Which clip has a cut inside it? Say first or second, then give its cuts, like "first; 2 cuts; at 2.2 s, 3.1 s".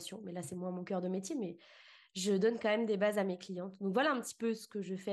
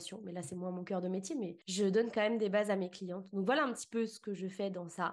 second; 1 cut; at 1.6 s